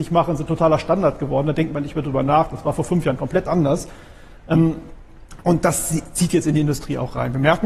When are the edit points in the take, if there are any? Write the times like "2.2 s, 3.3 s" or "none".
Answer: none

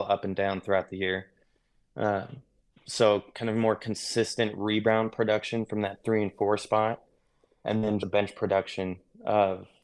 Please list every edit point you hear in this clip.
8.0 s

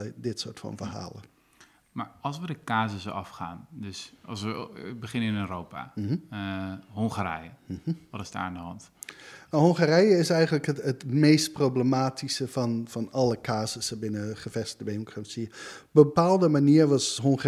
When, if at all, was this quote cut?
none

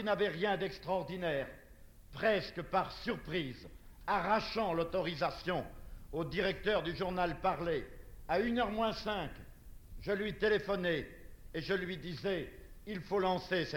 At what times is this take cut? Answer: 2.1 s, 11.5 s

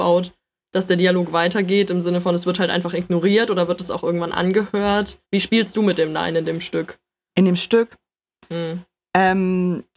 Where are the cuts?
5.2 s

